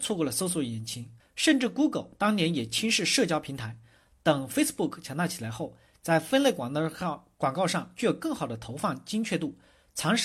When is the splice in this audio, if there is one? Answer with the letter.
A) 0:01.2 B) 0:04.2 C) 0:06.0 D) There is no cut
A